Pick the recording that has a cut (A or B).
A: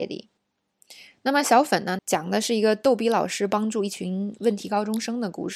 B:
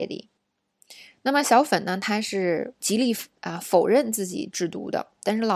A